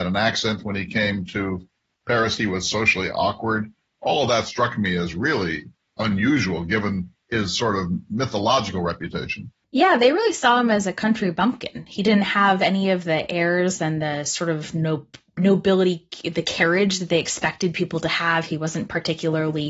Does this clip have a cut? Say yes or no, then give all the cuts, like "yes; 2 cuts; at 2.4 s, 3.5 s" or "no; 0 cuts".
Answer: yes; 1 cut; at 18.5 s